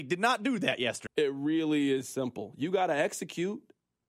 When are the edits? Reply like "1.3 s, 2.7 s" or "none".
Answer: 1.1 s